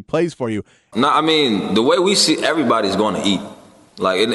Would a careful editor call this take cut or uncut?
cut